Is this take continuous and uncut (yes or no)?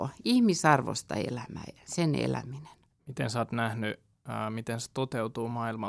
no